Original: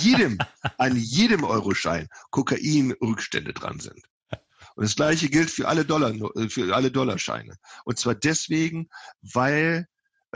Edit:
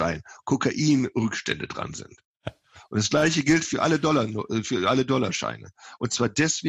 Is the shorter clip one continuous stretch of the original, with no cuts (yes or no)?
yes